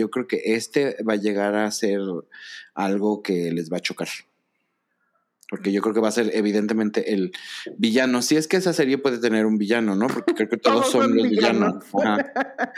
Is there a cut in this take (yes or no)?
no